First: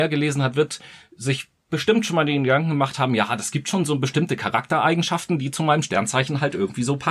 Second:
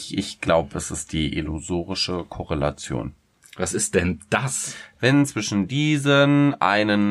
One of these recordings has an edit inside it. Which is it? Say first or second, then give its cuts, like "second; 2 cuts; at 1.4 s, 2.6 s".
second; 1 cut; at 5.0 s